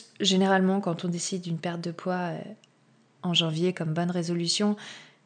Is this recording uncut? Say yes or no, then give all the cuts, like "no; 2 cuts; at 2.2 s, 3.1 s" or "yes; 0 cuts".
yes; 0 cuts